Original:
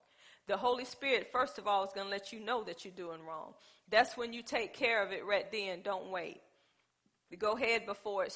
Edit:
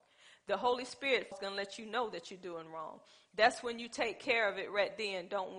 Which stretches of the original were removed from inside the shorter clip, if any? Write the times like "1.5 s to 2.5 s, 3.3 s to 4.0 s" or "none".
1.3 s to 1.9 s